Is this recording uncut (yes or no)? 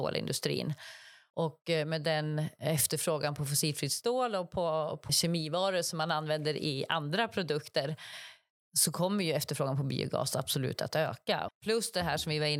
no